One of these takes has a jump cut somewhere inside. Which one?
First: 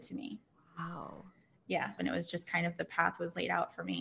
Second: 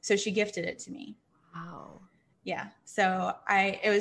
first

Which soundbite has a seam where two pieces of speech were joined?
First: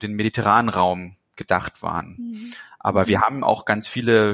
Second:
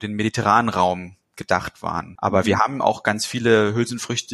second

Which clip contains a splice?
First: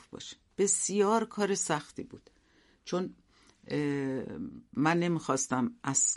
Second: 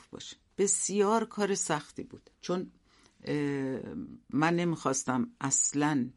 second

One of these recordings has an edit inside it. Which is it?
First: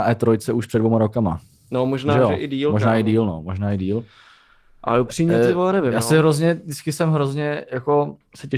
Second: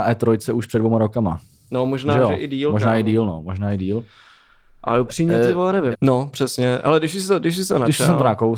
second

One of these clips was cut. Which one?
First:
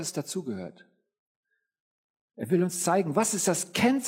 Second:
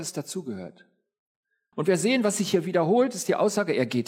second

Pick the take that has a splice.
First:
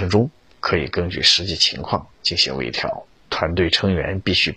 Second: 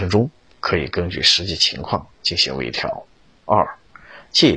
first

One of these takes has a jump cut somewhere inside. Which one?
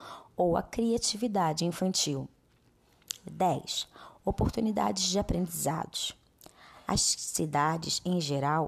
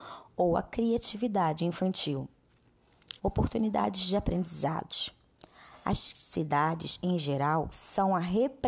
second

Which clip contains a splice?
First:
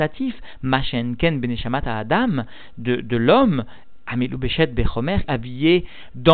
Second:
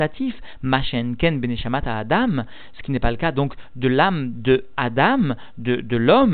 first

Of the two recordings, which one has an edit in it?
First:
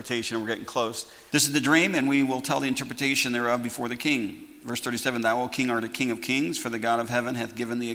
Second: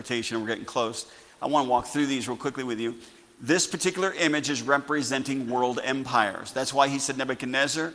first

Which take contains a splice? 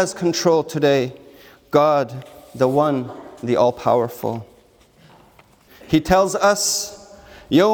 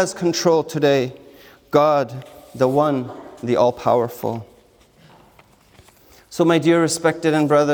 first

